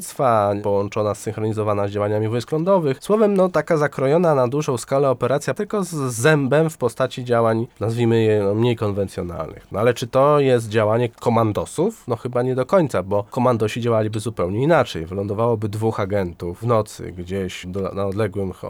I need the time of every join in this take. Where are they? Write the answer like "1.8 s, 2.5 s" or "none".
17.6 s